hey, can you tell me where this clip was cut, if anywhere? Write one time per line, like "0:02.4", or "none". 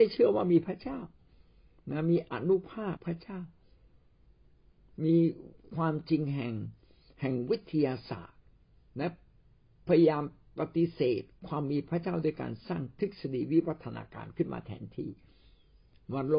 0:03.0